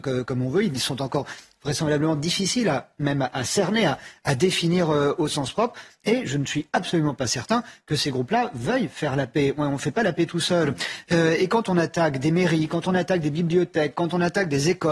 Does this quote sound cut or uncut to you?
uncut